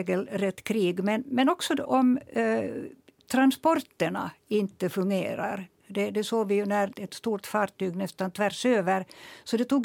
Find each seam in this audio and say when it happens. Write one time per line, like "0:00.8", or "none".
0:01.9
0:06.9